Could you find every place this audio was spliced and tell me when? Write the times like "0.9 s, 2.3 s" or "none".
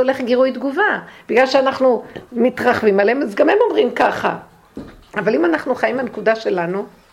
none